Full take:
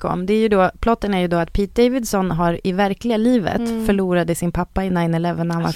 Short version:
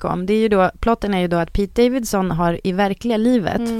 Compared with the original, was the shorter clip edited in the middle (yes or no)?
no